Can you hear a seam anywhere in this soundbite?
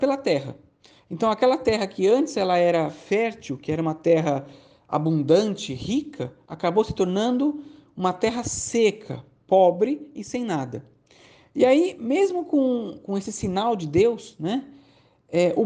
no; 0 cuts

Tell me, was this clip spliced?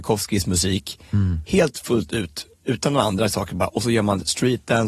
no; 0 cuts

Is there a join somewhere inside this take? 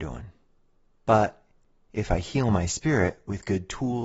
yes; 1 cut; at 0.9 s

